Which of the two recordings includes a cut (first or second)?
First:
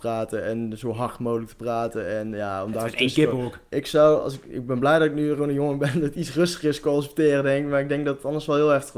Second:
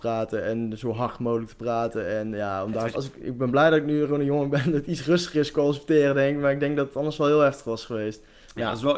second